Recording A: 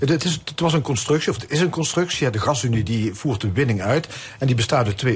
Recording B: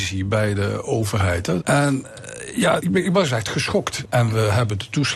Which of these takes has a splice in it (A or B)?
B